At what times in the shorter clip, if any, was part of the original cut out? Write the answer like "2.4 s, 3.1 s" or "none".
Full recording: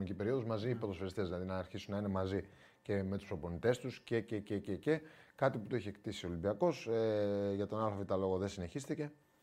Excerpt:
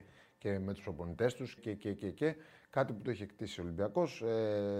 1.6 s